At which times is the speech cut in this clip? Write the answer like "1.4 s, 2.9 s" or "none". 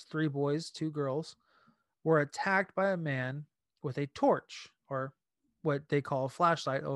none